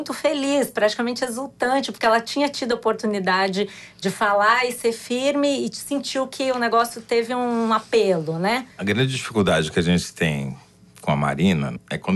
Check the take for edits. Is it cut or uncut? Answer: uncut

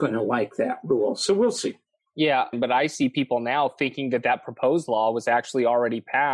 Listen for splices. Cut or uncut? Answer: cut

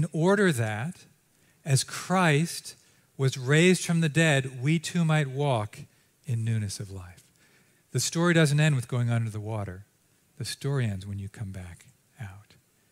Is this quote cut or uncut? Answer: uncut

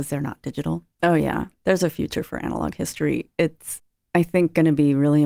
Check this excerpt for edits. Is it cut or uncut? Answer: cut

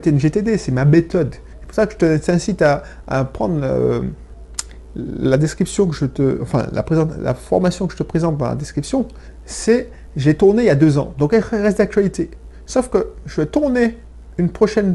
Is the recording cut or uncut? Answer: uncut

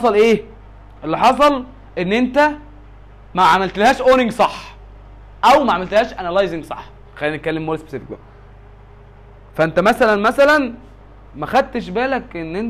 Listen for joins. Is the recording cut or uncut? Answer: uncut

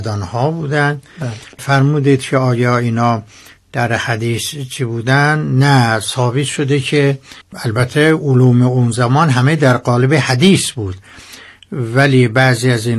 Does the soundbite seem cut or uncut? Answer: cut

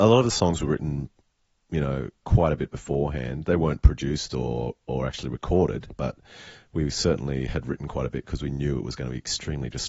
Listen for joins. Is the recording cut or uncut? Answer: cut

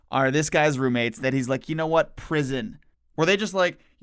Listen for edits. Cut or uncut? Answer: cut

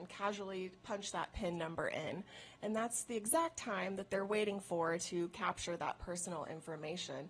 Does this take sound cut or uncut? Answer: uncut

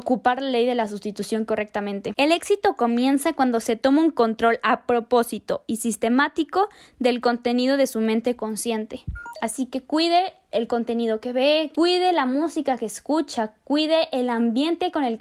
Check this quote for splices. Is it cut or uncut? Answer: cut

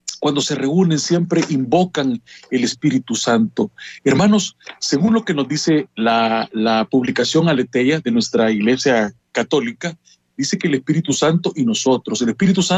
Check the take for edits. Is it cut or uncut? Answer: uncut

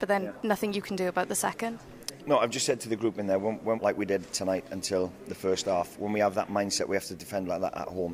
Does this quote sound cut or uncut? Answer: cut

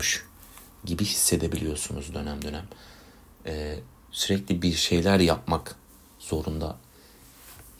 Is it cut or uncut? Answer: cut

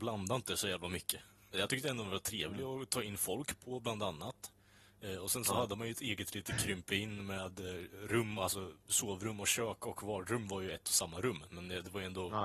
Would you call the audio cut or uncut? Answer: cut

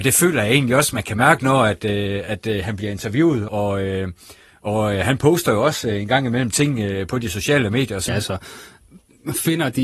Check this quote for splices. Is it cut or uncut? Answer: cut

